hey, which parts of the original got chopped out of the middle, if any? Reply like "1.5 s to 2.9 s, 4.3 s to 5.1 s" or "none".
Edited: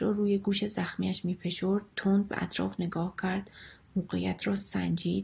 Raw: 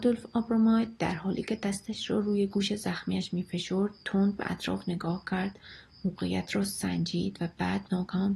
none